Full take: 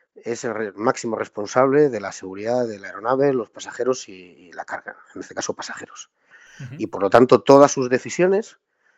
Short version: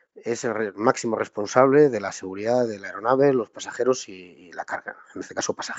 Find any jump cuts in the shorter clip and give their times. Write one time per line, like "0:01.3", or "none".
none